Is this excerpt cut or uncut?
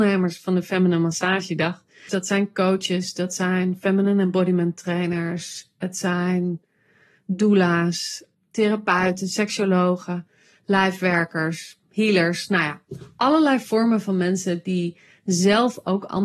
cut